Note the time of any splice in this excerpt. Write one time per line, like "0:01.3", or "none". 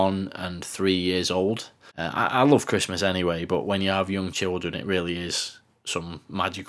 0:01.9

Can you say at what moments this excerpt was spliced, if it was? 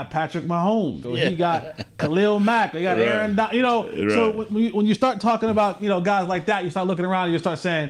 0:01.0

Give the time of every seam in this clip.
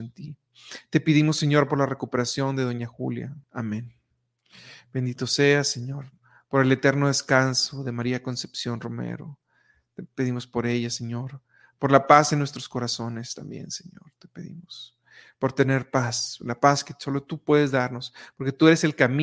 0:03.4

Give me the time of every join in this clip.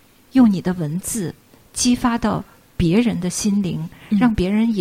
none

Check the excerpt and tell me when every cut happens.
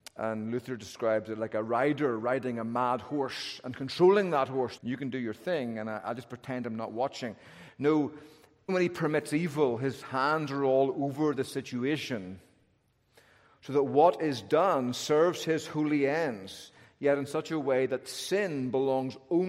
0:04.8
0:08.7

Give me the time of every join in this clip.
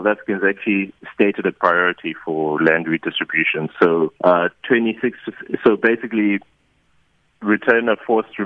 0:04.2

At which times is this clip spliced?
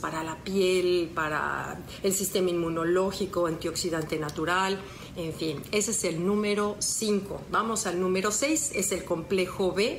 none

